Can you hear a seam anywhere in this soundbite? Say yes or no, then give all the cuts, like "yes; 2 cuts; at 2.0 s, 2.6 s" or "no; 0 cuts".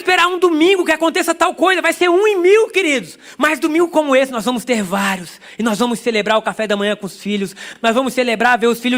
no; 0 cuts